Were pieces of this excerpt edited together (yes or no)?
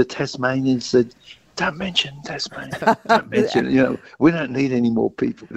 no